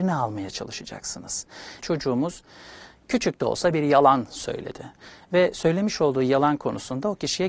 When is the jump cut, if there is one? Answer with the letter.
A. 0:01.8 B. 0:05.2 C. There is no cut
A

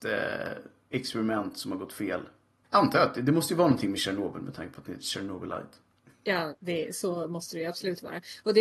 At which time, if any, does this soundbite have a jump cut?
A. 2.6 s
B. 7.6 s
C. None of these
A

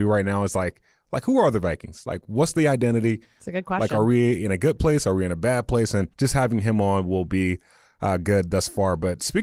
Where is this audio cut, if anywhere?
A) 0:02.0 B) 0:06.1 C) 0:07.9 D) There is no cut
B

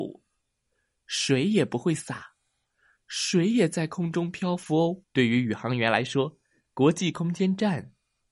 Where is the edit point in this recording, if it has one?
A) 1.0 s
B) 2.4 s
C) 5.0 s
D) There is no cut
C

